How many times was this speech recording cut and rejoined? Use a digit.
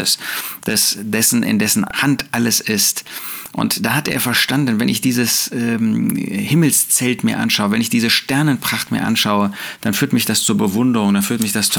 1